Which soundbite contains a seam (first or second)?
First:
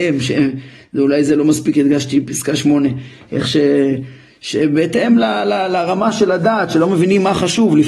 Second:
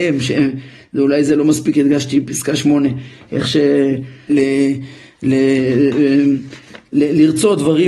second